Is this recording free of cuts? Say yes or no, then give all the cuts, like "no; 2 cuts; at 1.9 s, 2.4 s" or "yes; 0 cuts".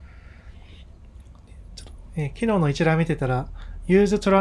yes; 0 cuts